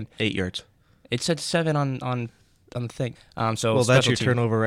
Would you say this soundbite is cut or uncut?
cut